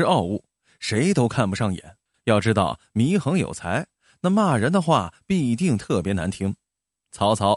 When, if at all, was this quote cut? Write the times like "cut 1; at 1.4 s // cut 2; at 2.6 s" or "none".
cut 1; at 2.1 s